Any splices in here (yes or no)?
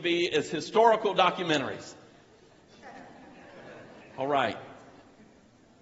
yes